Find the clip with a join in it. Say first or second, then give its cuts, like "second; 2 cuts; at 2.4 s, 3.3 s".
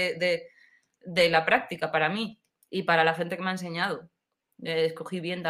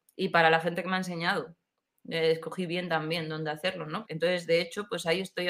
second; 1 cut; at 4.0 s